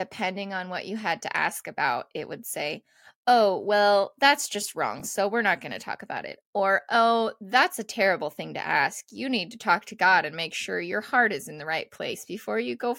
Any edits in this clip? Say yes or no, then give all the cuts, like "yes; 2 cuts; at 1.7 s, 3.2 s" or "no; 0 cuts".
no; 0 cuts